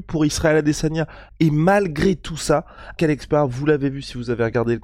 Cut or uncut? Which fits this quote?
cut